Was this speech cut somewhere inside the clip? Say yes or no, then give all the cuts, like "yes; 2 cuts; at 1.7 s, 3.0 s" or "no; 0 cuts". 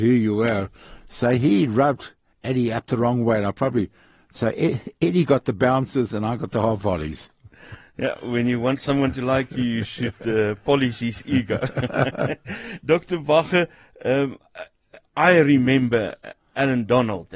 no; 0 cuts